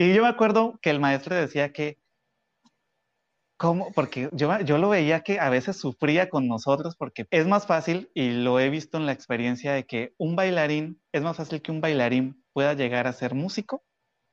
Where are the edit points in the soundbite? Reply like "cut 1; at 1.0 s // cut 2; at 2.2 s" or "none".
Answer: cut 1; at 7.3 s // cut 2; at 11.1 s